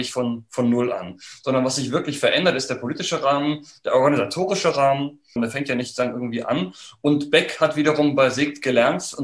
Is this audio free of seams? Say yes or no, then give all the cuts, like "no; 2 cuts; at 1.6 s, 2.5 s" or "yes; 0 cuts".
no; 1 cut; at 5.4 s